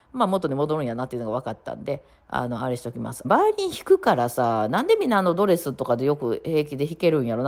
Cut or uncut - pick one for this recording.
cut